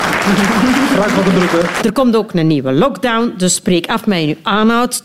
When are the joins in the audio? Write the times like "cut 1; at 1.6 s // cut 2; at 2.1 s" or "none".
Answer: cut 1; at 1.8 s